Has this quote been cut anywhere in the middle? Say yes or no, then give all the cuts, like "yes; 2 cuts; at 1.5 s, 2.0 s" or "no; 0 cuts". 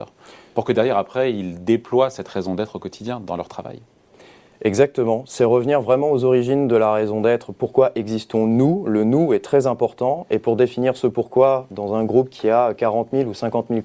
no; 0 cuts